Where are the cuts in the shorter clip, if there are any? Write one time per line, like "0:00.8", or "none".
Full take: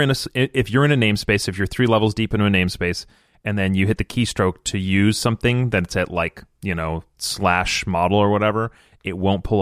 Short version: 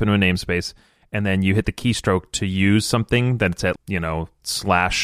0:03.8